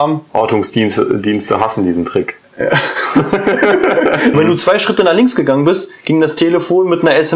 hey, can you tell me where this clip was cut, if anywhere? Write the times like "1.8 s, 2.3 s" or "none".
4.3 s

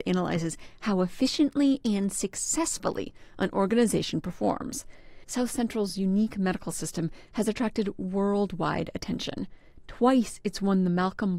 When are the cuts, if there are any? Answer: 5.2 s

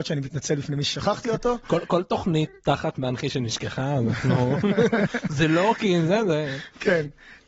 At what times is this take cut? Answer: none

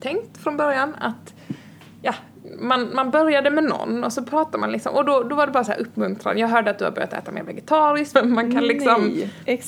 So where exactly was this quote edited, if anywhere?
8.1 s

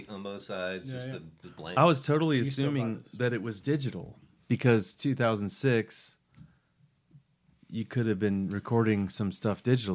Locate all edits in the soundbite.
1.4 s

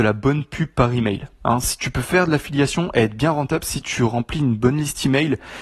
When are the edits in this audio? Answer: none

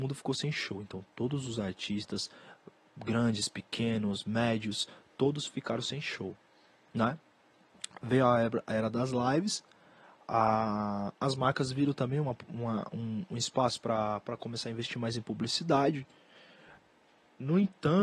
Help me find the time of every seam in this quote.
none

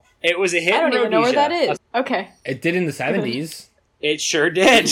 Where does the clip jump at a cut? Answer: 1.8 s

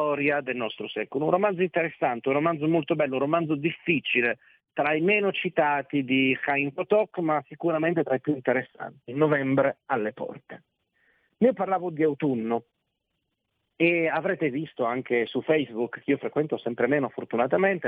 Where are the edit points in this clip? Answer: none

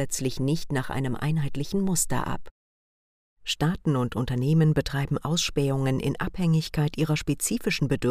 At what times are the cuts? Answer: none

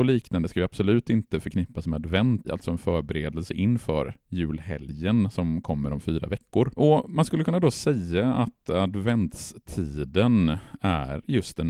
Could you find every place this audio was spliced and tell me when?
2.4 s, 6.8 s

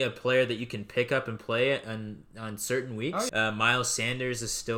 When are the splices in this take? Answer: 3.3 s

